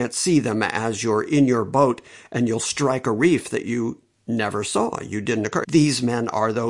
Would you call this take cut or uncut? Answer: cut